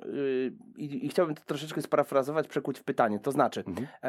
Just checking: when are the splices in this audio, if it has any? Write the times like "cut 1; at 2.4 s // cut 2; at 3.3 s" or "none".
none